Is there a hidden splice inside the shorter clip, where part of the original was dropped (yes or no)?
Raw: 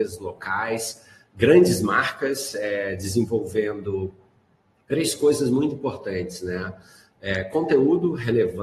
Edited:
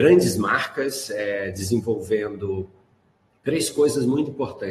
no